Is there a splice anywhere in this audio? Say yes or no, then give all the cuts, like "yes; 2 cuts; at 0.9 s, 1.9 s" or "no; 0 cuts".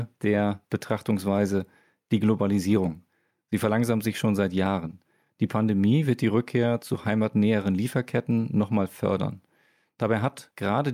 no; 0 cuts